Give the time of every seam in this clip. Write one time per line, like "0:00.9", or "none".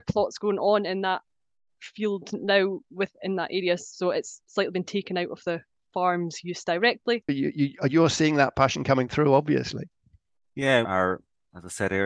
0:07.3
0:10.8